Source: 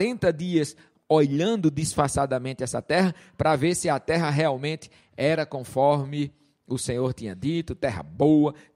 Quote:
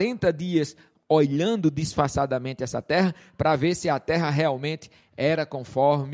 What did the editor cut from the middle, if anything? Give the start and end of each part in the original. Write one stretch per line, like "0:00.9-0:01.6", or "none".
none

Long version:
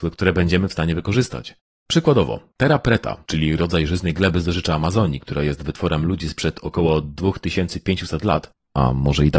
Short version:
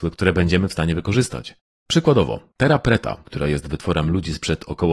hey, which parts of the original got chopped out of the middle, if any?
0:03.3-0:05.2

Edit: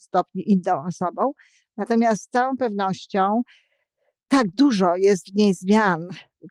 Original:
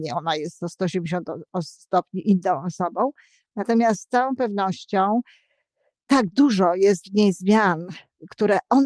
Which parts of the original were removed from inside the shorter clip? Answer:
none

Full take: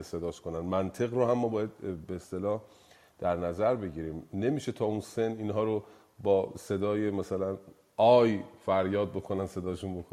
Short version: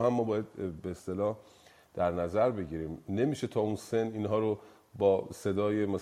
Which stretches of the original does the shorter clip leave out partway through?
none

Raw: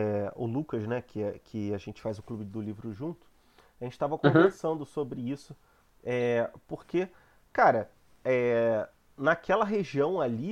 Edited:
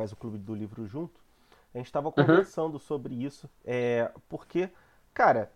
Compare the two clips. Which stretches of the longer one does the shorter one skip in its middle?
0:05.6-0:05.9

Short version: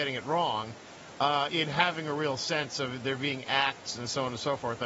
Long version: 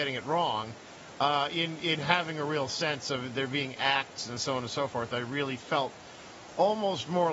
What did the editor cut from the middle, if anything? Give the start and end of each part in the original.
0:01.5-0:01.8

